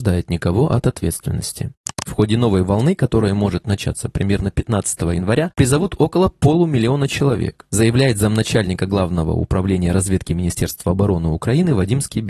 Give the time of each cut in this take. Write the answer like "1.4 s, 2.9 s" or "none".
2.1 s